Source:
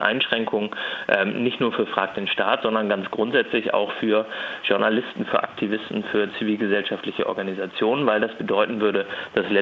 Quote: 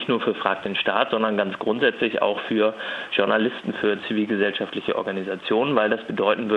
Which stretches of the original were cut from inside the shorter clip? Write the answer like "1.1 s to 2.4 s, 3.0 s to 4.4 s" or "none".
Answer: 5.2 s to 6.0 s

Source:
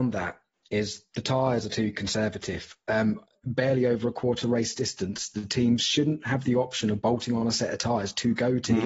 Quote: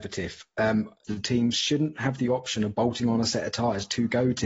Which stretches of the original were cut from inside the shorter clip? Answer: 3.3 s to 5.3 s

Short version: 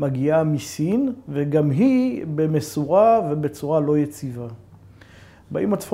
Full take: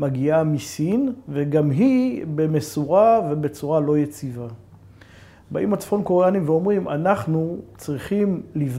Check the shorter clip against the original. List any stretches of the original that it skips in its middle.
none

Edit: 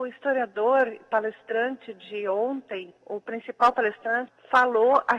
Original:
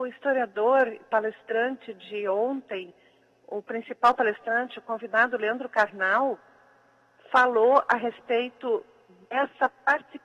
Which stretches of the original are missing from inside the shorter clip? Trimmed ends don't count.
3.0 s to 3.4 s, 4.7 s to 7.1 s

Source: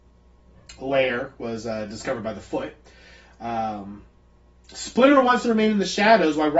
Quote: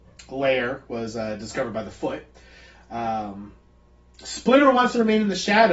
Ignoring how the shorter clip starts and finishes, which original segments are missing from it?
none

